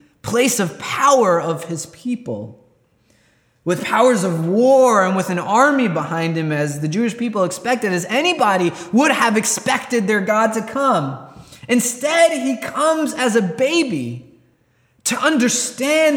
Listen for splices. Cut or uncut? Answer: uncut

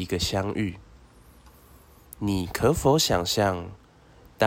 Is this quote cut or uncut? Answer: uncut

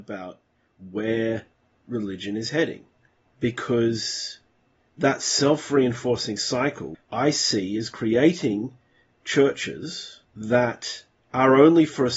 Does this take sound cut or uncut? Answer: cut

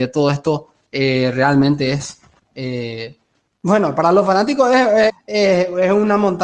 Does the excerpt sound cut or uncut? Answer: cut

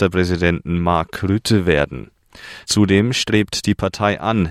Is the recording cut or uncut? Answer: cut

